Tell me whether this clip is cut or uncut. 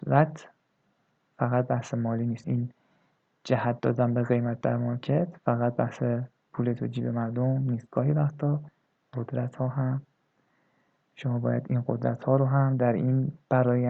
cut